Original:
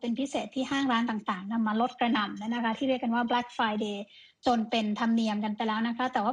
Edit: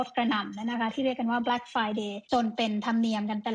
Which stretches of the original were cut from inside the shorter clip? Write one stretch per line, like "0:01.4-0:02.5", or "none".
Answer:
0:04.1-0:04.4